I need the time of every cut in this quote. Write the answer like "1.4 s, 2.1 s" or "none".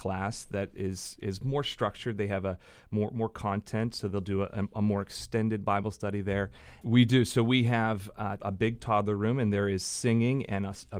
6.8 s, 8.4 s